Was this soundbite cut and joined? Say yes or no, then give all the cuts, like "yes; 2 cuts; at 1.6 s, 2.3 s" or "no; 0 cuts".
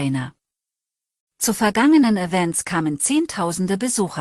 yes; 1 cut; at 1.3 s